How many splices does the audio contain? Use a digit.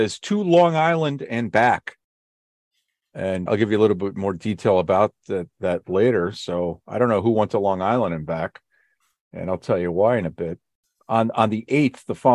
1